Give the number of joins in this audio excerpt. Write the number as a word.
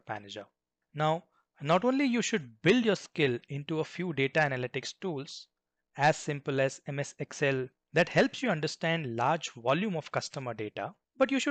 one